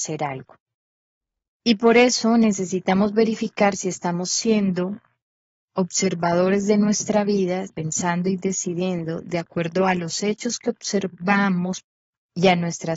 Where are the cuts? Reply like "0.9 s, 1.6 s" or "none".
7.7 s